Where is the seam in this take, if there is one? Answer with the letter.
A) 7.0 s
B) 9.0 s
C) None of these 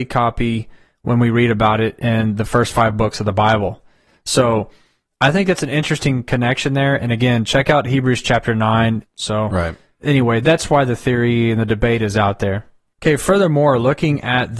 B